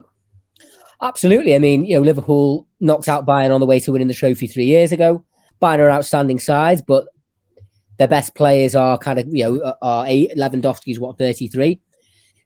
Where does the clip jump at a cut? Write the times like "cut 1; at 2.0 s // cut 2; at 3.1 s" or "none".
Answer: cut 1; at 5.5 s